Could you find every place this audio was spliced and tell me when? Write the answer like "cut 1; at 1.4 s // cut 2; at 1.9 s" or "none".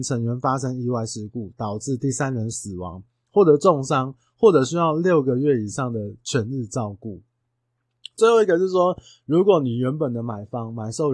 none